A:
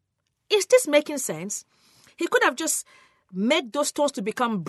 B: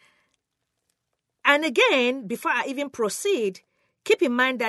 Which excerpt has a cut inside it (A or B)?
A